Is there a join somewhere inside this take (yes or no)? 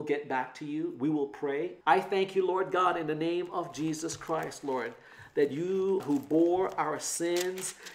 yes